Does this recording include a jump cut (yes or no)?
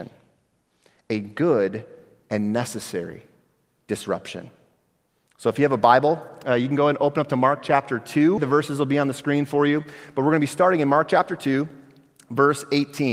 yes